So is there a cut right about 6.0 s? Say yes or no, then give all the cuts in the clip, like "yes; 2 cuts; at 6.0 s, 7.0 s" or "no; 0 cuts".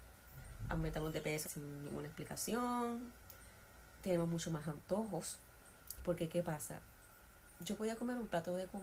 yes; 2 cuts; at 1.4 s, 6.0 s